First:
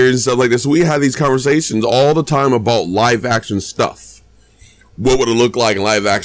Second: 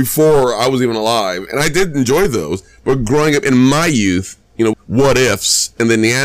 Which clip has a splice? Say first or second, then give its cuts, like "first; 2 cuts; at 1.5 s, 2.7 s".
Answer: second; 1 cut; at 4.7 s